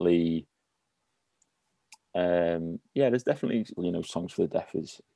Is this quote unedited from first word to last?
no; 1 cut; at 3.8 s

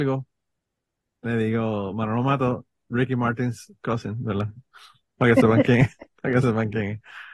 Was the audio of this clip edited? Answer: no; 0 cuts

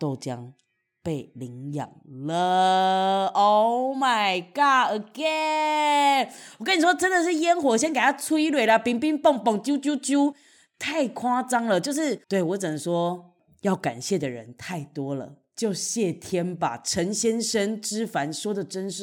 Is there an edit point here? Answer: yes; 1 cut; at 12.2 s

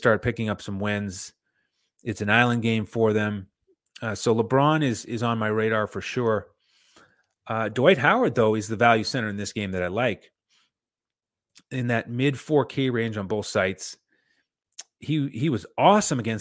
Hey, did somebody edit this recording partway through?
no; 0 cuts

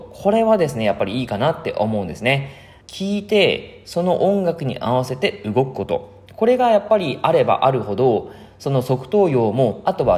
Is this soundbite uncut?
no; 1 cut; at 2.8 s

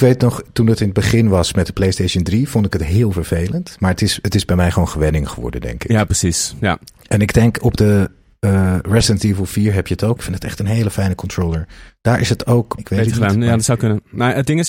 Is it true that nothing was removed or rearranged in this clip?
no; 2 cuts; at 10.2 s, 12.8 s

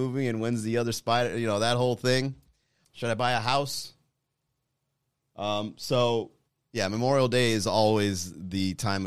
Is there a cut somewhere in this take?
yes; 1 cut; at 2.8 s

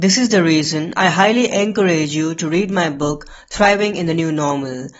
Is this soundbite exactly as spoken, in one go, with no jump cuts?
yes; 0 cuts

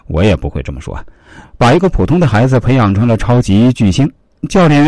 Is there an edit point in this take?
yes; 1 cut; at 1.4 s

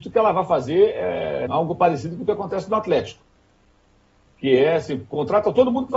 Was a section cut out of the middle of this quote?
yes; 1 cut; at 1.5 s

